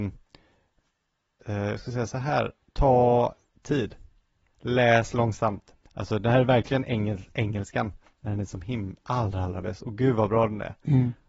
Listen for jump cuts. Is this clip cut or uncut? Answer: cut